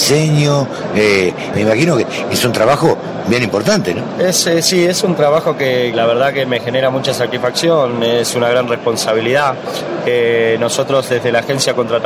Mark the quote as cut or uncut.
cut